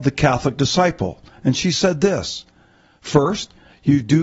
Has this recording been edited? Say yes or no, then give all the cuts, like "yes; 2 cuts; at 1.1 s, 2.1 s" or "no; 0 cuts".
no; 0 cuts